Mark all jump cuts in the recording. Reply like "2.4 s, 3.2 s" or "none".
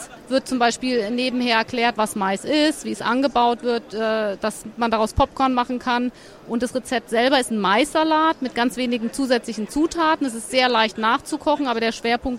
none